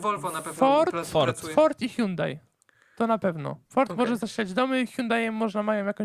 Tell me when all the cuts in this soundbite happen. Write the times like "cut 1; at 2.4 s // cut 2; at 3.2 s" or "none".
cut 1; at 3.6 s